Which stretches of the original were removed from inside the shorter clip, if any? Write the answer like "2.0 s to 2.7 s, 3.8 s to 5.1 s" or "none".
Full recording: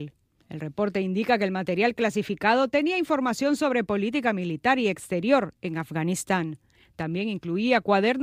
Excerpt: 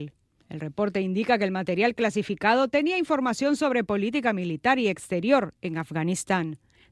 none